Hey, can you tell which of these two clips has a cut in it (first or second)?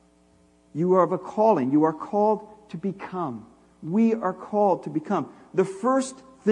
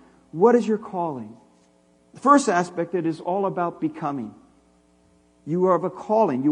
second